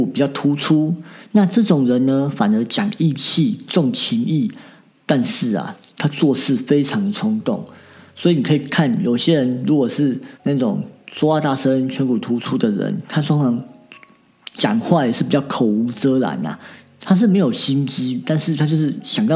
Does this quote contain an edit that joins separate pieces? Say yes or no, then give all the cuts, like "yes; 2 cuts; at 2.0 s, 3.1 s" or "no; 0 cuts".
yes; 1 cut; at 10.4 s